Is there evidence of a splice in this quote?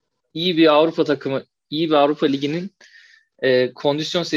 no; 0 cuts

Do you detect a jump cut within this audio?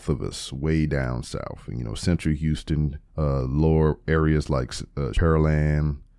yes; 2 cuts; at 3.1 s, 5.1 s

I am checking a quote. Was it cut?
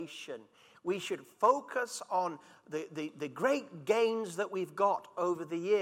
no; 0 cuts

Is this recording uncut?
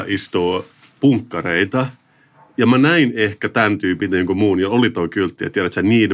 yes; 0 cuts

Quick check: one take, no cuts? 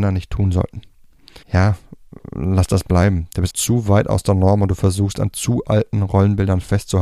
no; 2 cuts; at 1.4 s, 3.5 s

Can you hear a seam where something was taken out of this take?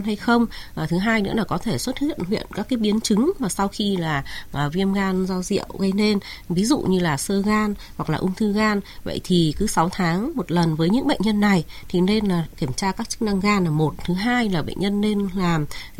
no; 0 cuts

